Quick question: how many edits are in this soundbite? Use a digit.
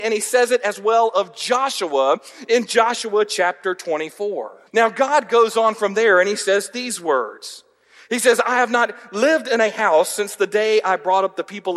1